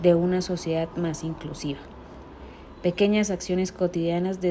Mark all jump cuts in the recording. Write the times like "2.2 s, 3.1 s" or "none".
none